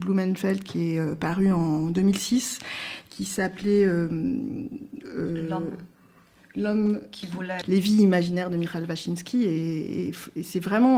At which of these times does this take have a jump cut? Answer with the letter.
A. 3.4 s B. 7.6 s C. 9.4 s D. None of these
B